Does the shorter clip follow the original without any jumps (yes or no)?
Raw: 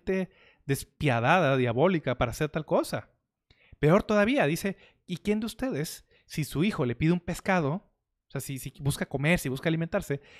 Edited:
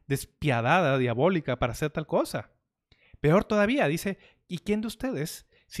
yes